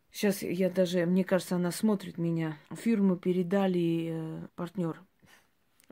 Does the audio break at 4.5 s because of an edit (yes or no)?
yes